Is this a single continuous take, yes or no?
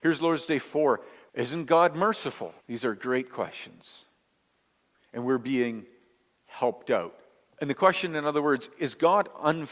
no